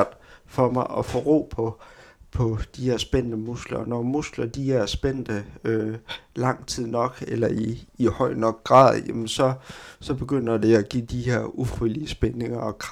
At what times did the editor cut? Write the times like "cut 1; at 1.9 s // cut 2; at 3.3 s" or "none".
none